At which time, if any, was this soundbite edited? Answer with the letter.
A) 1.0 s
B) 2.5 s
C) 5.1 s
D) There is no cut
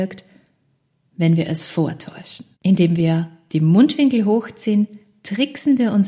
B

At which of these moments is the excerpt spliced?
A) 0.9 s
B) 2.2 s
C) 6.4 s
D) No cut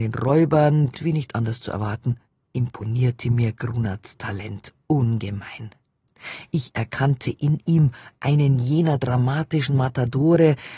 A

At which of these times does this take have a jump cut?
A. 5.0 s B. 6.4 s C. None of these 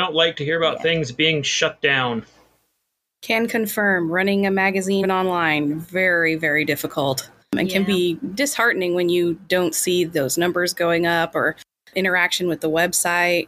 A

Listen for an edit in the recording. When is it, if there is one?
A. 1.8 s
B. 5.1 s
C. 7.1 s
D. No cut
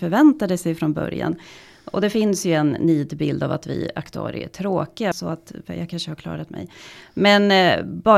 B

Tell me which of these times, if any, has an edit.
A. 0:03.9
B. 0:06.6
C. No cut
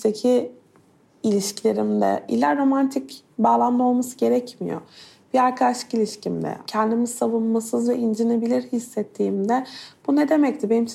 B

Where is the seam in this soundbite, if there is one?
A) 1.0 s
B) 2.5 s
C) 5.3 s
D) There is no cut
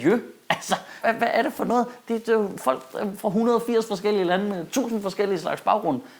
A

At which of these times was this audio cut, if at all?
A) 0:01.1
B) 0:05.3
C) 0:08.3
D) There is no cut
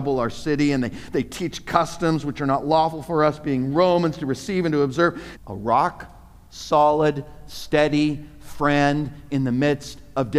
B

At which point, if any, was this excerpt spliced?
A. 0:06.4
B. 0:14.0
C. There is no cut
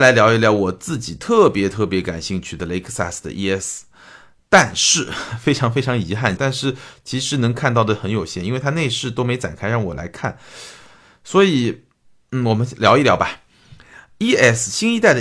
A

